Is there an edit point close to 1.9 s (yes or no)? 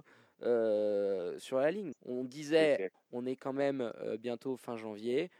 yes